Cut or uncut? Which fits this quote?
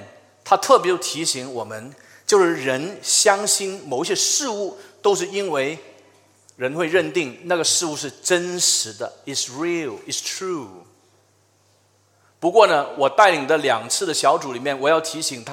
uncut